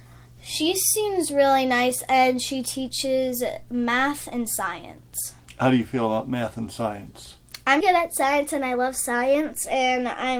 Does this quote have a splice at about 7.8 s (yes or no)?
yes